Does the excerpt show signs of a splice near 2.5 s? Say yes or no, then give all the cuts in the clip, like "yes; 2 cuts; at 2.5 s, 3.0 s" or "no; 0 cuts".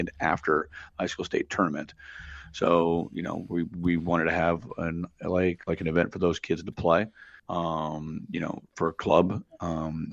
no; 1 cut; at 7.4 s